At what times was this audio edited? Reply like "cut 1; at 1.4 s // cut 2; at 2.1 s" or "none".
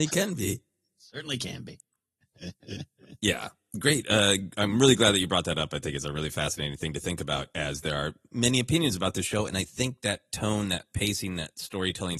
none